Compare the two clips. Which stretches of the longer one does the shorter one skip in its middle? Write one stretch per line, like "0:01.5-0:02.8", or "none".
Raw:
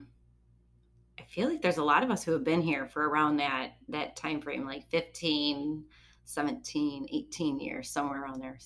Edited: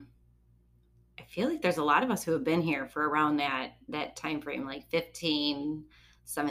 none